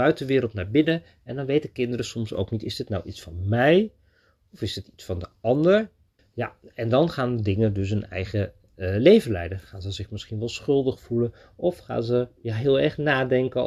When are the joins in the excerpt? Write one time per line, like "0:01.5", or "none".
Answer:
0:06.2